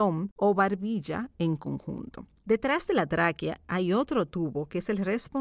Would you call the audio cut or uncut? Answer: uncut